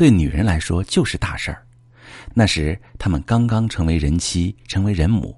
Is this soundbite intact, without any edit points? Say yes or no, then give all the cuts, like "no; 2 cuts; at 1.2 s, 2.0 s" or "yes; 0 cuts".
no; 1 cut; at 2.3 s